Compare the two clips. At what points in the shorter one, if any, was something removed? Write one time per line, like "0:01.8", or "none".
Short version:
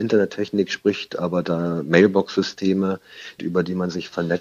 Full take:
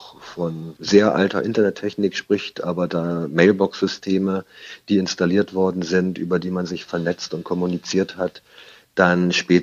0:03.4

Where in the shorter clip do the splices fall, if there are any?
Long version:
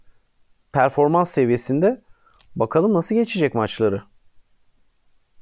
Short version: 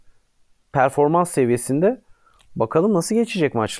none

